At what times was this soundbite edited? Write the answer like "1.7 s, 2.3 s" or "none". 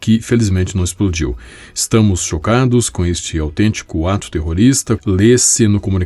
5.0 s